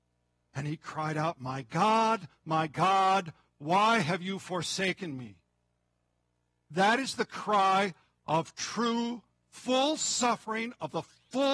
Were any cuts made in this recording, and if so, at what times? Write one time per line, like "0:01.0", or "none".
none